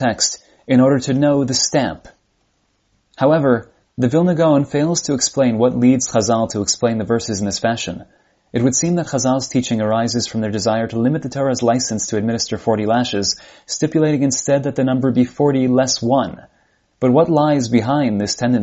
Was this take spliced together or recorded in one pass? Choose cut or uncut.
uncut